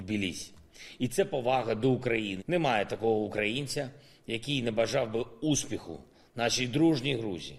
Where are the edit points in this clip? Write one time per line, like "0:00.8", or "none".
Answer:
0:02.4

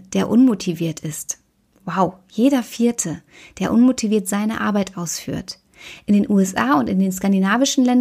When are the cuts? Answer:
none

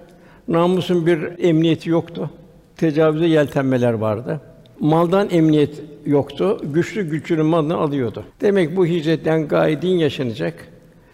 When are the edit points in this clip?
none

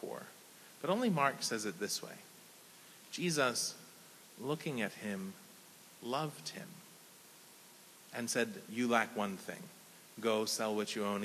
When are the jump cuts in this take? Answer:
none

